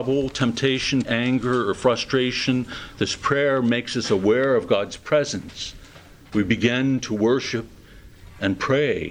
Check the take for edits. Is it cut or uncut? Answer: cut